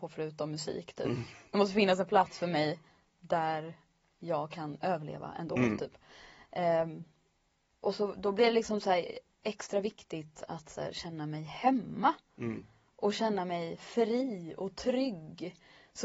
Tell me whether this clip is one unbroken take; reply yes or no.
yes